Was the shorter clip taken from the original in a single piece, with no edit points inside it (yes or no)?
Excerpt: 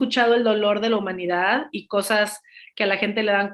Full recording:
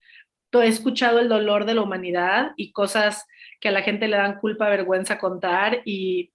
yes